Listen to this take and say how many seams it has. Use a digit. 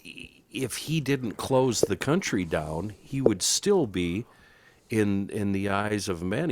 0